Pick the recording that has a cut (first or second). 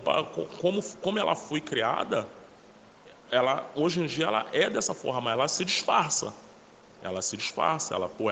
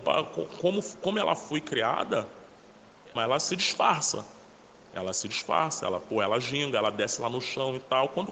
second